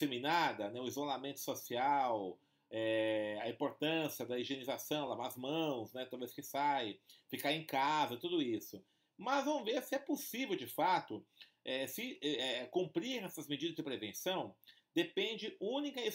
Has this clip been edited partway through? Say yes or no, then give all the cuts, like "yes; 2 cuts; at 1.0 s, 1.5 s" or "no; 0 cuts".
no; 0 cuts